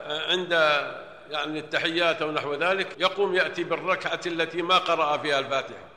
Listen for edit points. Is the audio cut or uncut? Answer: cut